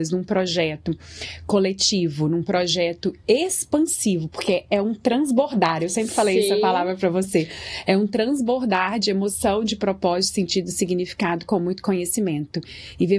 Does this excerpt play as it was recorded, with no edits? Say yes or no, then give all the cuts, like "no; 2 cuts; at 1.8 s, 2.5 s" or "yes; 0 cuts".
yes; 0 cuts